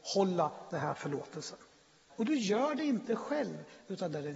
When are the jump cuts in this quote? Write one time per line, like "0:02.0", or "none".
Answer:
0:02.1